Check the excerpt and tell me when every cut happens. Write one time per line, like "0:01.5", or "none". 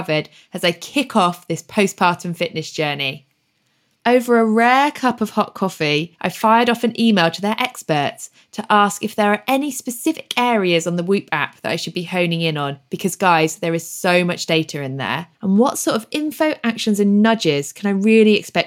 0:15.3